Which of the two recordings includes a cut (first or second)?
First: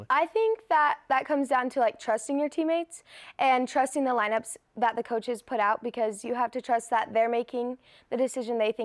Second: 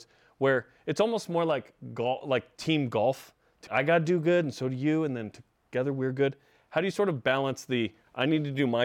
second